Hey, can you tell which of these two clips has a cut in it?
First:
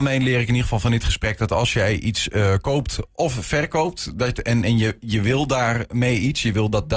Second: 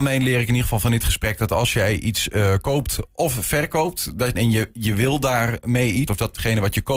second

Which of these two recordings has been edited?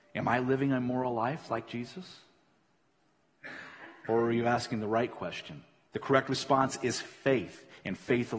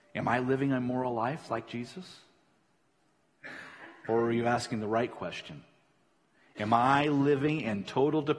first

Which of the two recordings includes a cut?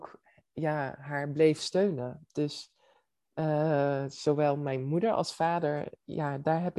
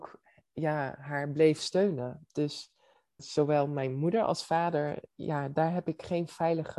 second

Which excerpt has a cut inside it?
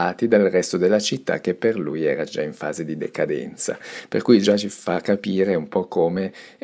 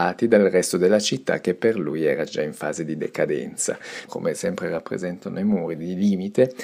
second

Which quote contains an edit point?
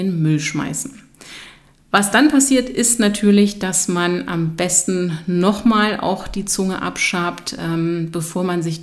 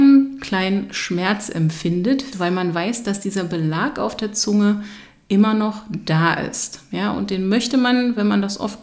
second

